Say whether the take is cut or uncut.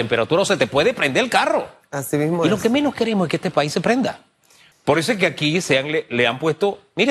cut